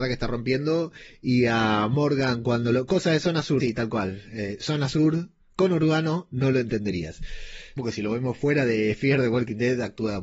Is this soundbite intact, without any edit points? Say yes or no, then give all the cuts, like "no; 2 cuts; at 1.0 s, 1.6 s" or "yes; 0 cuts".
no; 2 cuts; at 3.6 s, 7.8 s